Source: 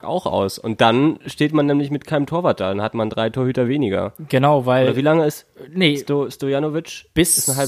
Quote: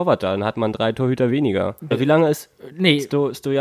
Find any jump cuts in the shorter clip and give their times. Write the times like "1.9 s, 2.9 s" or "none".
1.9 s

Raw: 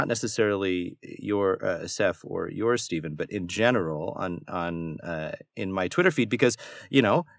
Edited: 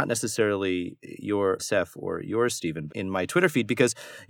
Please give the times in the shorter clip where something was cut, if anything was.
1.6 s, 2.9 s

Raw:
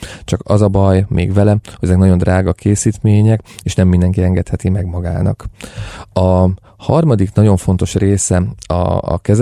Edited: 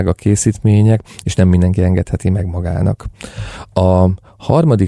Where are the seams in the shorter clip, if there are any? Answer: none

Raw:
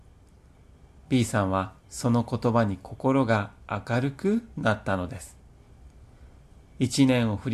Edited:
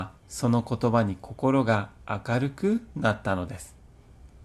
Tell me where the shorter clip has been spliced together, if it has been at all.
none

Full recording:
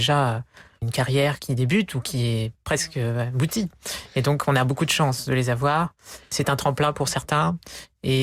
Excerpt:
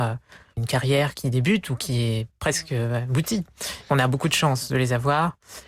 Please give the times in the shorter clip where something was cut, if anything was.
3.9 s

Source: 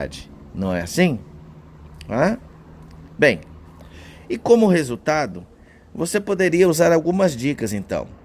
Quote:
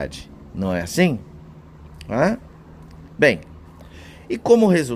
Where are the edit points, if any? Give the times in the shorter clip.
none

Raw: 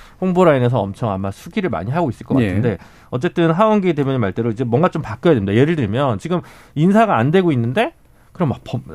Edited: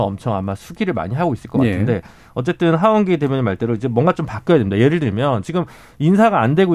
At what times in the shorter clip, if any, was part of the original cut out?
none

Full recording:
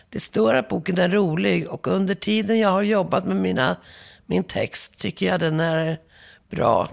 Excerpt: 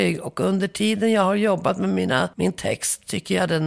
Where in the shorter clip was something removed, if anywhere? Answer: 2.3 s

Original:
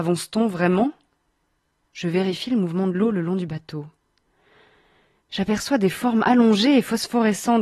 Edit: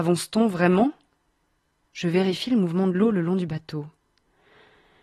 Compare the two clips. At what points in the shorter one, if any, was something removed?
none

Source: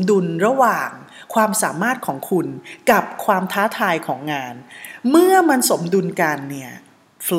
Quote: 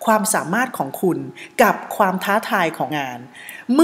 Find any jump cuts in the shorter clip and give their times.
2.9 s

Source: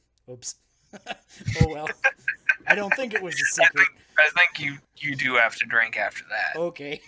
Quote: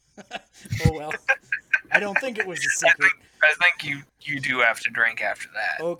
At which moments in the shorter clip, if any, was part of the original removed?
none

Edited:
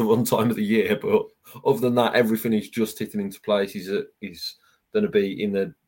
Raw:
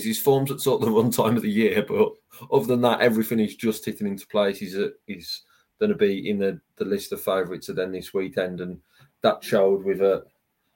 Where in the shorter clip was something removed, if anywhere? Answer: none

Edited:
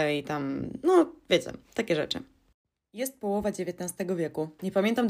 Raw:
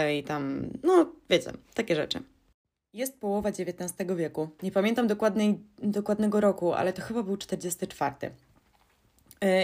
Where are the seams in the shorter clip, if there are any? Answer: none

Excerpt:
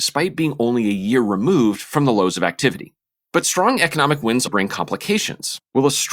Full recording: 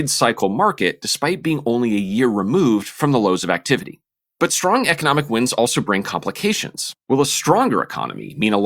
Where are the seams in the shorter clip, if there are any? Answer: 4.5 s

